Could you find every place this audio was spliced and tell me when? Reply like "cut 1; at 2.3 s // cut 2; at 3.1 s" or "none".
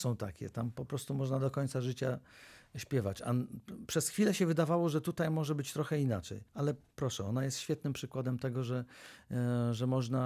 cut 1; at 6.5 s